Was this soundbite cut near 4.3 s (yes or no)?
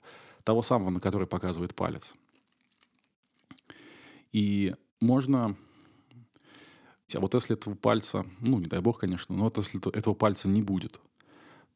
no